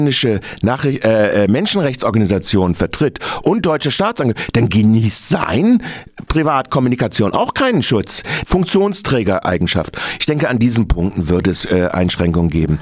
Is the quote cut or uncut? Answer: cut